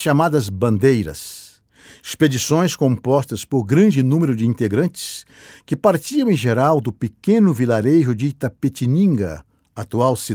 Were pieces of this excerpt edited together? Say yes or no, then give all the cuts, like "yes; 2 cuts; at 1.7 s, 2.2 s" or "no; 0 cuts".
no; 0 cuts